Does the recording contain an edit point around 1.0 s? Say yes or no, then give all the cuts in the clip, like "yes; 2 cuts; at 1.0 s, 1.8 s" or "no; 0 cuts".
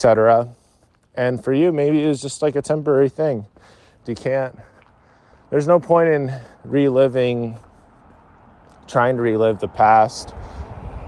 no; 1 cut; at 4.0 s